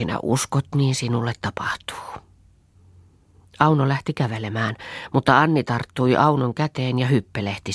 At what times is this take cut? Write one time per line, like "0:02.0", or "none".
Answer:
none